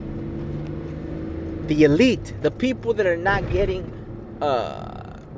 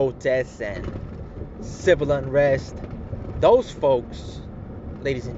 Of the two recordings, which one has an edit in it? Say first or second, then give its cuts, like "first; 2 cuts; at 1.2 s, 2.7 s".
first; 1 cut; at 2.4 s